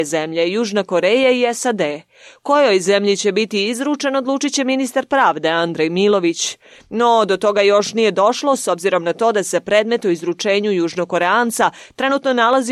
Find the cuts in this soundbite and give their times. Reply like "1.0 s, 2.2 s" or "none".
none